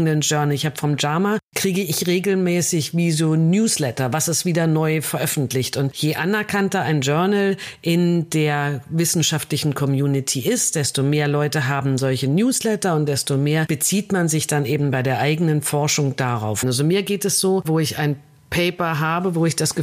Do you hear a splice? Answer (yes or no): yes